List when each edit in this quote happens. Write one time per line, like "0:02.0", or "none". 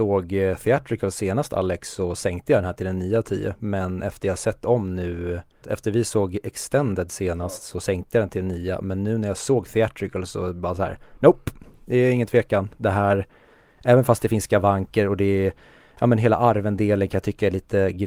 0:05.6